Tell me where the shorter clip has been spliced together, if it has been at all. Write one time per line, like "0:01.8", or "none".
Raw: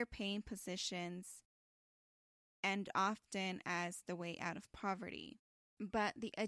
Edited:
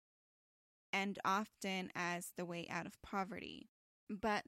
none